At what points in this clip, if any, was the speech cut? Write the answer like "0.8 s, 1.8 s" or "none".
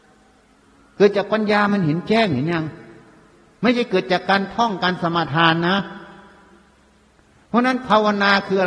none